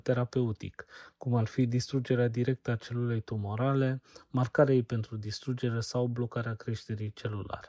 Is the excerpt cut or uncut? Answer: uncut